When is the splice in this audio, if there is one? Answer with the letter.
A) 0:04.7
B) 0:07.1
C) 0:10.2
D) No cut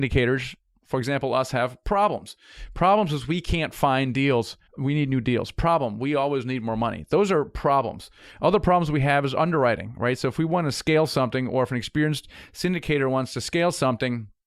A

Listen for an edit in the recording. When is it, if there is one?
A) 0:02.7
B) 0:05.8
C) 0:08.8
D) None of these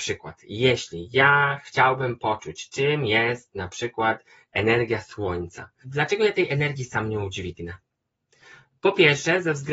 B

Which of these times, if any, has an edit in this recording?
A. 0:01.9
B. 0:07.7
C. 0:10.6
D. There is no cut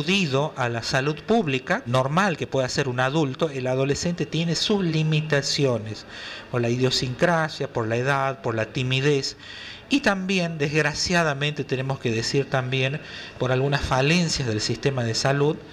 A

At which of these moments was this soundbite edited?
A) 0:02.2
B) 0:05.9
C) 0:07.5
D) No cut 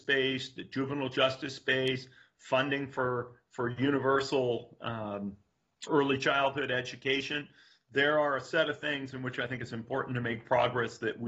B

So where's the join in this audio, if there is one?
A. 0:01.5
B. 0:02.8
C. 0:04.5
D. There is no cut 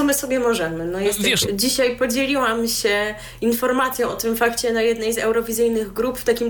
A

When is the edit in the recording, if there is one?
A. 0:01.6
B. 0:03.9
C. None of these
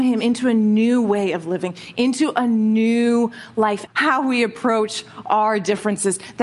B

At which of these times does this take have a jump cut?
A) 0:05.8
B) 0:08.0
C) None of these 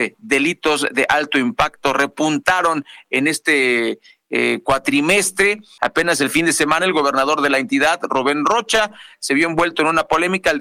A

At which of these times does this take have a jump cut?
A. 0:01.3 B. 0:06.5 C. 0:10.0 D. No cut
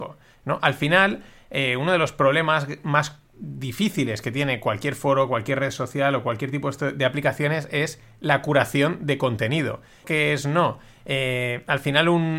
C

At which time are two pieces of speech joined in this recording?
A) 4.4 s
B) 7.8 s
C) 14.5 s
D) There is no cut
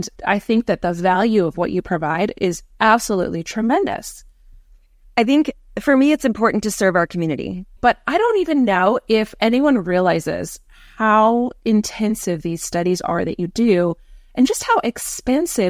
B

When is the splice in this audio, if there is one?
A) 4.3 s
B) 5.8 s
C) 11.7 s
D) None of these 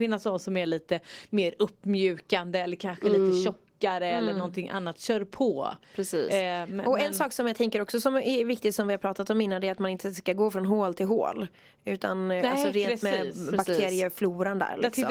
D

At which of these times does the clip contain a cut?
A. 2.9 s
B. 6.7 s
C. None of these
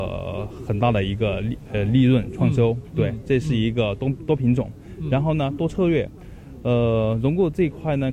C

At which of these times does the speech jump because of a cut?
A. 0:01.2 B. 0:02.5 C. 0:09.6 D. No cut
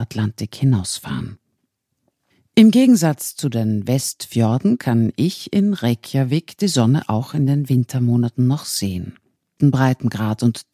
C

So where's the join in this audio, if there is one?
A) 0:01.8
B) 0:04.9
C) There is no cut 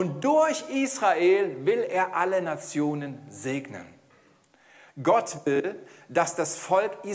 B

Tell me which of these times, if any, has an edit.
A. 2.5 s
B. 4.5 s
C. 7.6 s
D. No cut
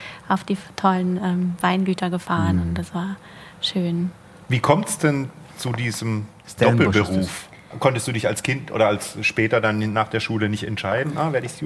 D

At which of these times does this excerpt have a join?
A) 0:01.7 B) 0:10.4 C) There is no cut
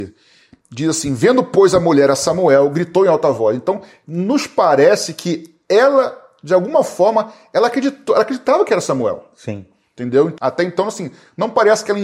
B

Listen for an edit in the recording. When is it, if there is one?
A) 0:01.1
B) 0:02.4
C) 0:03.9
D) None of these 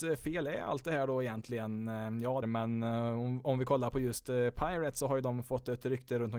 B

